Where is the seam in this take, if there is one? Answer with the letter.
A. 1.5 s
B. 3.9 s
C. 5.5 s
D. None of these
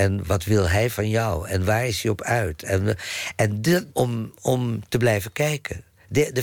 B